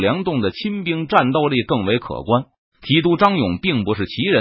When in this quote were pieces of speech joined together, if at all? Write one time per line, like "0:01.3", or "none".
none